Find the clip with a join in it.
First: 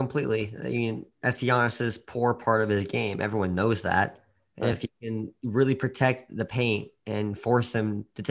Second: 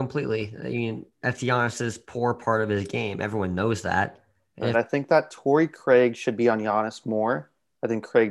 second; 1 cut; at 4.7 s

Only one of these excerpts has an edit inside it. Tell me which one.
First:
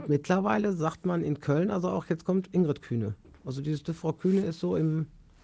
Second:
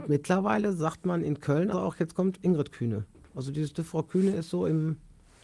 second; 1 cut; at 1.7 s

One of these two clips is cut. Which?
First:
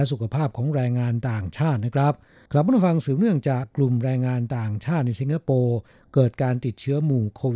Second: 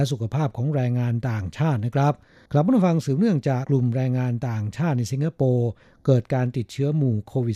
second; 1 cut; at 3.6 s

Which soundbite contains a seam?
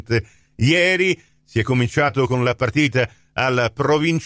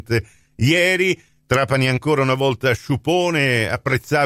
second; 1 cut; at 1.4 s

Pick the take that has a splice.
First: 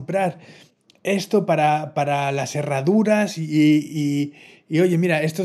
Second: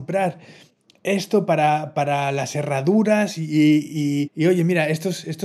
second; 1 cut; at 4.3 s

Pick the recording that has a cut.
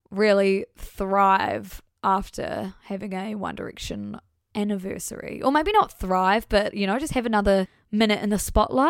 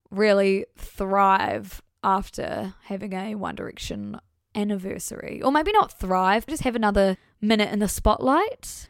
second; 1 cut; at 6.5 s

